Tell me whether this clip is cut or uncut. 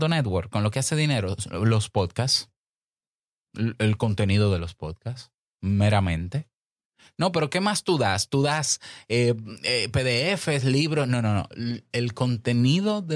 uncut